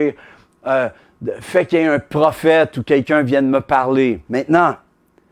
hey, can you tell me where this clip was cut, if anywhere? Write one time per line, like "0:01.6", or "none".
0:04.2